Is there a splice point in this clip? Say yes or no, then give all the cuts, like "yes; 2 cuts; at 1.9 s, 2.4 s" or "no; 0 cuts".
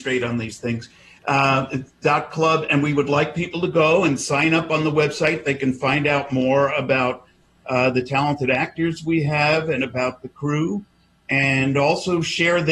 no; 0 cuts